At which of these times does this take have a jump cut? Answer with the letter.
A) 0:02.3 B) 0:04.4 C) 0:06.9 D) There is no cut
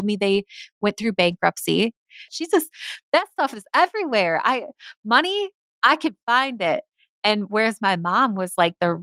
A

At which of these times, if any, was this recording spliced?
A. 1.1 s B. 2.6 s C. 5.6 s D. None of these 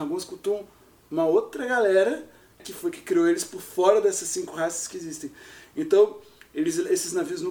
B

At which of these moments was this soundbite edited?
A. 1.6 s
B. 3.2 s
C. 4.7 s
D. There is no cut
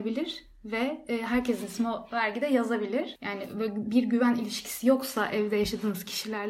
D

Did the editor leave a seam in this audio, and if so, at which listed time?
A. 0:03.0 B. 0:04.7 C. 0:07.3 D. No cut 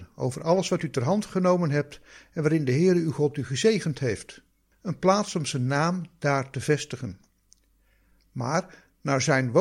B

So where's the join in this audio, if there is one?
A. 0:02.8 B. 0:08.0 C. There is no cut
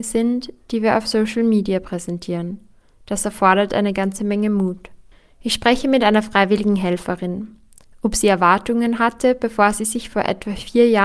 C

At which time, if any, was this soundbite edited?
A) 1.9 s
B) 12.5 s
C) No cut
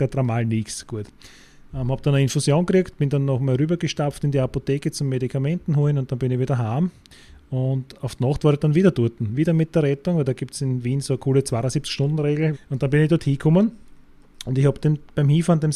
B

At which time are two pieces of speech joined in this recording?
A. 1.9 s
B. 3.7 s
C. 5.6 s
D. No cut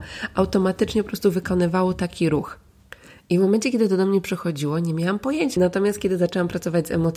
C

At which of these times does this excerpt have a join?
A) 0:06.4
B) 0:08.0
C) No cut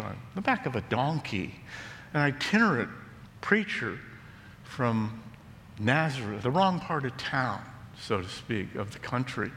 A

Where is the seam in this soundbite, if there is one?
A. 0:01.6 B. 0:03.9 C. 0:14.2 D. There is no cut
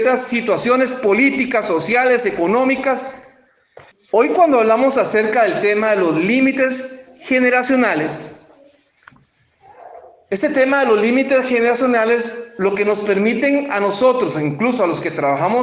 B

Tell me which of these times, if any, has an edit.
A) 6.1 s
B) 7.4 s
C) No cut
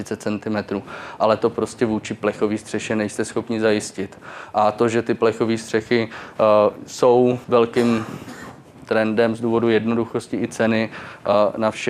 B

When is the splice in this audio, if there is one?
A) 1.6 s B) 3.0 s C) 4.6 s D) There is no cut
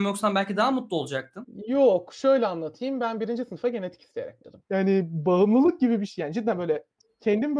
C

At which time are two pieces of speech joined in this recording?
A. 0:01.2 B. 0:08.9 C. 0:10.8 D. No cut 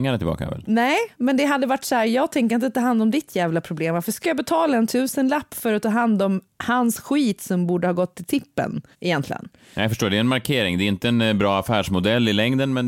B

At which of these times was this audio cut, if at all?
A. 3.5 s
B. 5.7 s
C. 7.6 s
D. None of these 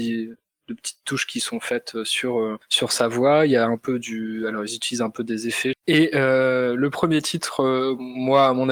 B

